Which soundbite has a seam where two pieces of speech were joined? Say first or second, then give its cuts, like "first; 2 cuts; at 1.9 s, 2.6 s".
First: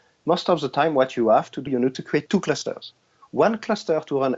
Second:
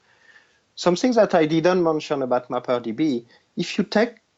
first; 1 cut; at 1.7 s